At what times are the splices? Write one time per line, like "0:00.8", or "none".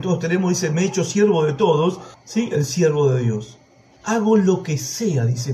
0:02.1
0:04.0